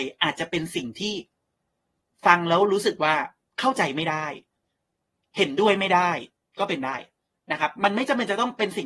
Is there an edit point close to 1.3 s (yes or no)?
no